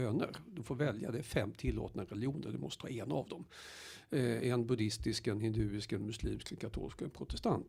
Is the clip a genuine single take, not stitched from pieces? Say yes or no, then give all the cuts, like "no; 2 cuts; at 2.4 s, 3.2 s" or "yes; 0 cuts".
yes; 0 cuts